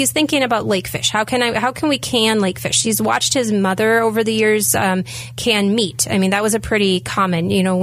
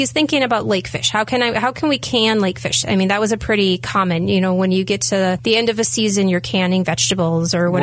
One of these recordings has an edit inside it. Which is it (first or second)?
second